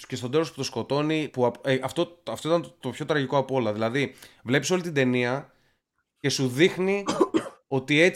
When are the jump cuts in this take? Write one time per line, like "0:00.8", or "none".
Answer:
none